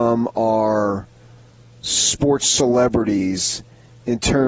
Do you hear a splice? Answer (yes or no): no